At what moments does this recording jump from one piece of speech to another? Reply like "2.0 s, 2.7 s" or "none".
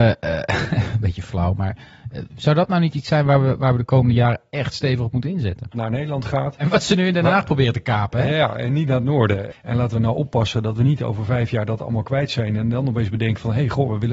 5.7 s, 9.5 s